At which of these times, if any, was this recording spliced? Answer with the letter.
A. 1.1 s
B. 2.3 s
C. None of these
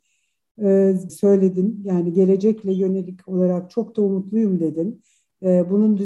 A